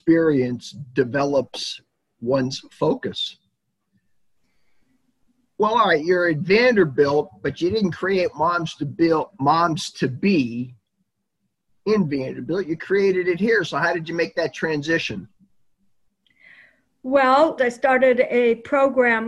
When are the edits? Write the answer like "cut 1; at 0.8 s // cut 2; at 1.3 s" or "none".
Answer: cut 1; at 17.6 s